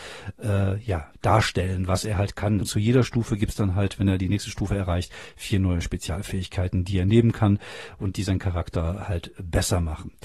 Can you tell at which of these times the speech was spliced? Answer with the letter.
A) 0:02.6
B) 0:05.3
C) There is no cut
A